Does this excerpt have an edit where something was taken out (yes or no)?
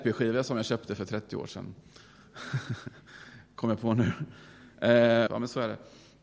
yes